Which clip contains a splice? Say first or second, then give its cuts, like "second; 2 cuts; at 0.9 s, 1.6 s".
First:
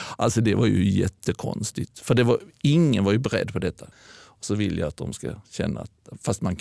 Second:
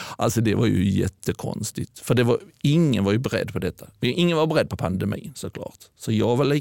first; 1 cut; at 3.9 s